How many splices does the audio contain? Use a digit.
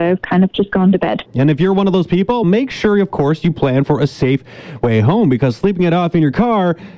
2